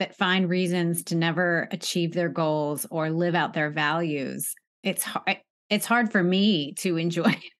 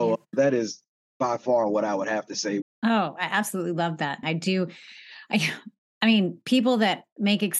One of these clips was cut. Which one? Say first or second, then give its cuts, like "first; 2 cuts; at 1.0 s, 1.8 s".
second; 2 cuts; at 2.6 s, 4.2 s